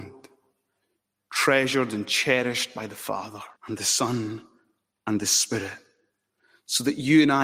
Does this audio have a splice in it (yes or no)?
yes